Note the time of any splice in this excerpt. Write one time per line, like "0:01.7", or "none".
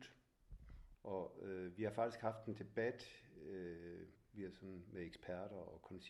0:00.9
0:04.2